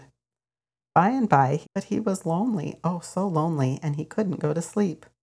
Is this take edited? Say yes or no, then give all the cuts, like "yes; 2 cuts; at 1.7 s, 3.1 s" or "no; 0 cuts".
yes; 1 cut; at 1.6 s